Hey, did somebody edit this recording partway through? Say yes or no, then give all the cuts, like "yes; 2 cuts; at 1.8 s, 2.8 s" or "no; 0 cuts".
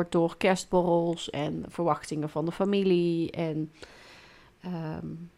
no; 0 cuts